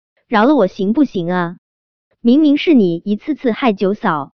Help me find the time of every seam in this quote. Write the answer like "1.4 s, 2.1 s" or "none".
2.1 s